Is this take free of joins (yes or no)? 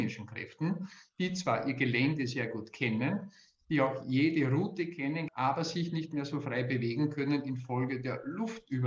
no